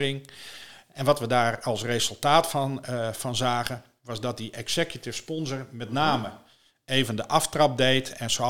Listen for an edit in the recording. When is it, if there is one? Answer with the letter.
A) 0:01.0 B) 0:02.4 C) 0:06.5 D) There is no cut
D